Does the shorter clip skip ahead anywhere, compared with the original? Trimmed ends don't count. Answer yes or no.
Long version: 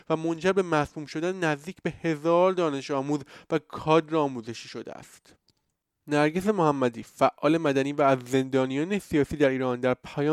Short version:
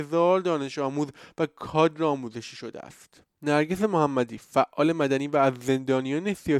yes